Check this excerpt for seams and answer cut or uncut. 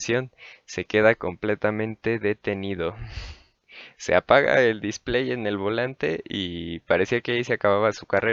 uncut